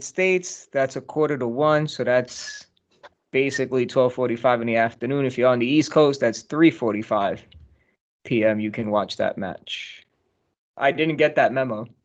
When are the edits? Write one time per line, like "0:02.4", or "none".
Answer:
0:10.6